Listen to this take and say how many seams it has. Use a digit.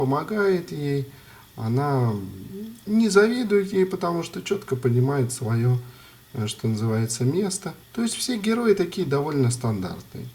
1